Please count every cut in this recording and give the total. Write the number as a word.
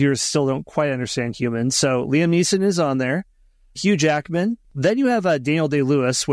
one